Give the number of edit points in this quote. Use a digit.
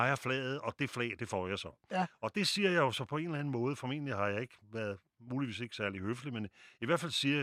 0